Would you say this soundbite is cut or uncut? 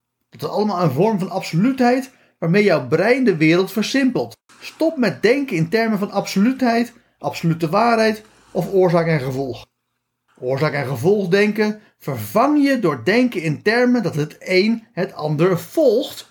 cut